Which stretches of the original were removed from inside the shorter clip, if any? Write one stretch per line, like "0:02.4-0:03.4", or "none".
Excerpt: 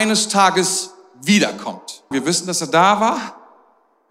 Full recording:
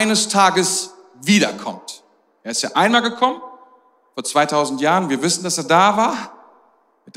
0:02.1-0:05.1